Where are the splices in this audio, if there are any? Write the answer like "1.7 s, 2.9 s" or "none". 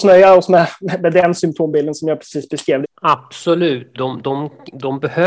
2.8 s, 3.9 s